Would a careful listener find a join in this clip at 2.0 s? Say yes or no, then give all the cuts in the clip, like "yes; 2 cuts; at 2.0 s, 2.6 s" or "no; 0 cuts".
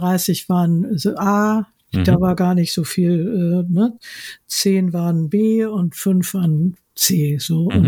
no; 0 cuts